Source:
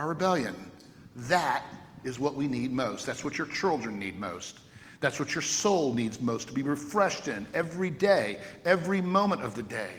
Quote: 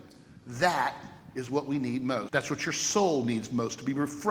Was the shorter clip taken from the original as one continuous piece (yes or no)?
no